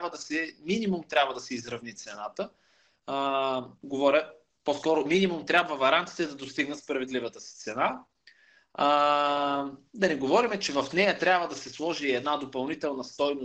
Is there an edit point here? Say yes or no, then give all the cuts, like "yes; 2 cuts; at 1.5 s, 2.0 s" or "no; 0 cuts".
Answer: no; 0 cuts